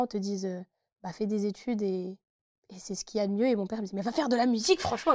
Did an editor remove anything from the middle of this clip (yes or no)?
no